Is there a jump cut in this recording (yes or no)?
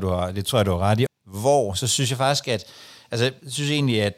yes